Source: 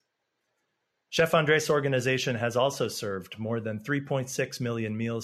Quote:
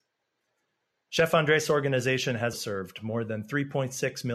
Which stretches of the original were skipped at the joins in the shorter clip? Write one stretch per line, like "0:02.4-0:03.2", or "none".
0:02.5-0:02.9